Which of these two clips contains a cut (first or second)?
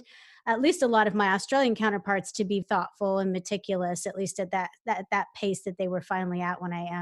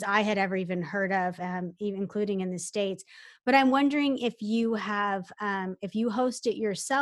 first